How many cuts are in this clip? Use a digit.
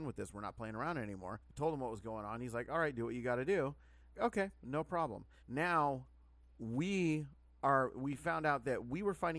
3